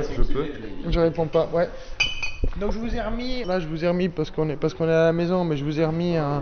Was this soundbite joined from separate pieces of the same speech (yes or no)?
yes